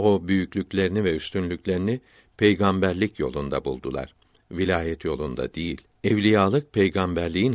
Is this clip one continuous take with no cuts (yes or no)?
yes